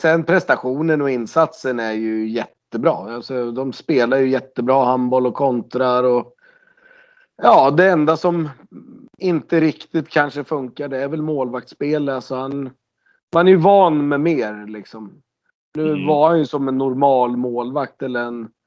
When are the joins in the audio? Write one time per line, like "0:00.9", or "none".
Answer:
none